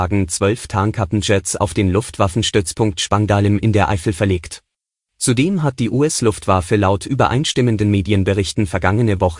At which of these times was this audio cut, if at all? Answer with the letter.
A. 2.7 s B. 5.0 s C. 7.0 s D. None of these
B